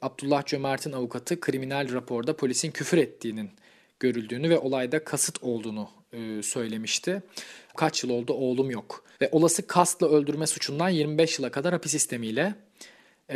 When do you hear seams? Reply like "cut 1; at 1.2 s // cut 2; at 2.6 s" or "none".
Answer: cut 1; at 7.7 s // cut 2; at 9.1 s